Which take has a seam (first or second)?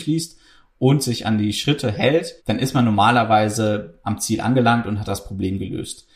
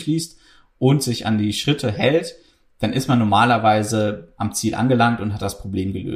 first